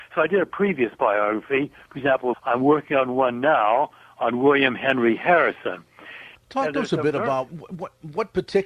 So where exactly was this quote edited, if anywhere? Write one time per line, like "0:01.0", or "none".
0:02.3
0:06.3
0:07.5